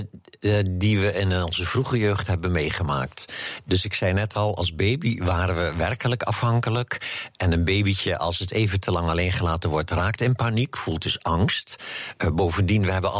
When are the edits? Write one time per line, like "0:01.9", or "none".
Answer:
none